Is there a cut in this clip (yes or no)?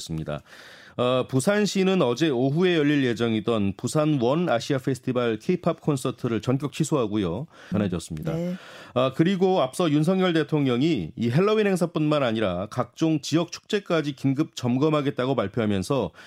yes